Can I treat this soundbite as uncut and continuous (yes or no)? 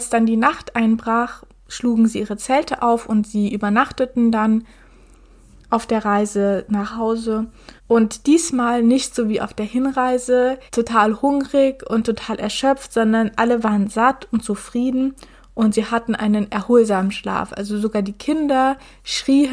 no